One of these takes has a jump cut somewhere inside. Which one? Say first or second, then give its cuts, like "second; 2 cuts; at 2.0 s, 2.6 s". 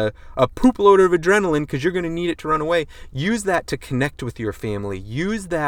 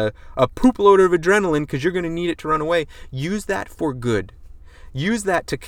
first; 1 cut; at 3.1 s